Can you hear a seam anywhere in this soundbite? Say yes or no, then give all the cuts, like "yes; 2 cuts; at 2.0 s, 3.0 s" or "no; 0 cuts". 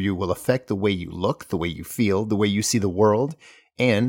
no; 0 cuts